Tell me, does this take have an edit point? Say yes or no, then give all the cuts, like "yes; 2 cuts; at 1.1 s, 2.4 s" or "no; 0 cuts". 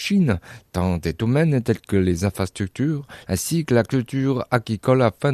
yes; 1 cut; at 3.2 s